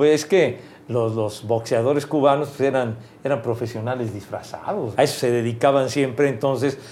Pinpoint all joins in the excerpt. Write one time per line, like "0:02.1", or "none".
0:04.9